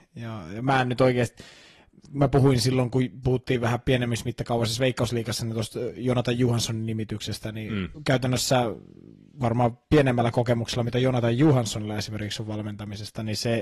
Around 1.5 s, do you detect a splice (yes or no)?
no